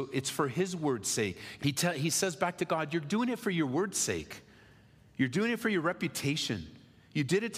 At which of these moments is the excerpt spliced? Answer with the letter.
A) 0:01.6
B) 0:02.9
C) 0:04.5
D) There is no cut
A